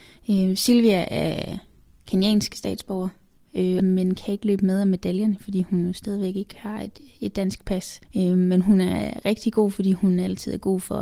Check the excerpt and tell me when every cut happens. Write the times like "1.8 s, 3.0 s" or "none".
3.8 s, 8.1 s